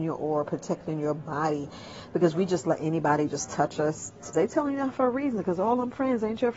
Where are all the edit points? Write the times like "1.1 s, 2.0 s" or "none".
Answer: 4.3 s

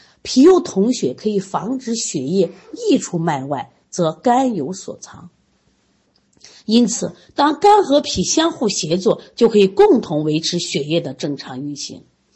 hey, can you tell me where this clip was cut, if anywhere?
none

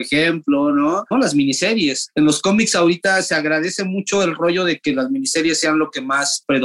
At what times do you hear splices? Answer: 1.1 s

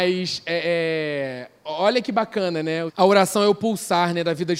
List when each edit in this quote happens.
2.9 s

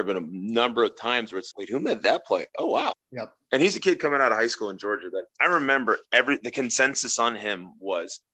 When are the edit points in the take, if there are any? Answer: 1.5 s, 2.9 s, 5.3 s

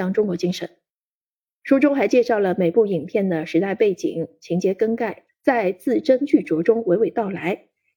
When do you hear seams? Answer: 5.3 s

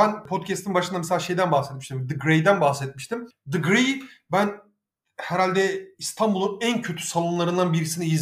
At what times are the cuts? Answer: none

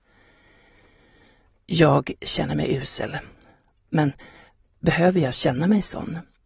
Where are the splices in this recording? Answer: none

